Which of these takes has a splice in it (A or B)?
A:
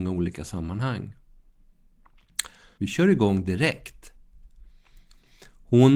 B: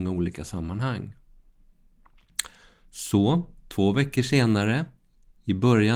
A